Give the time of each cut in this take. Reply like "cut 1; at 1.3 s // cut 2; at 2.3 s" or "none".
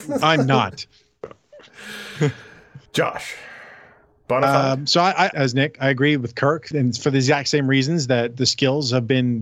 cut 1; at 5.3 s // cut 2; at 6.7 s